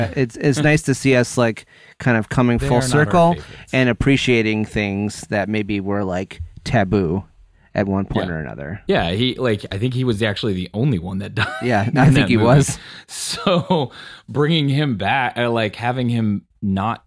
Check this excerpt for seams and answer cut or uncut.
cut